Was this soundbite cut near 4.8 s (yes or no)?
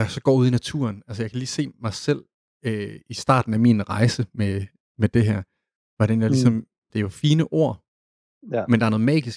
no